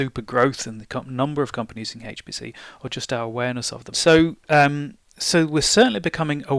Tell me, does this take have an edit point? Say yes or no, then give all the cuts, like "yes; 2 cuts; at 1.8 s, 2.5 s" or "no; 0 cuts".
yes; 1 cut; at 3.9 s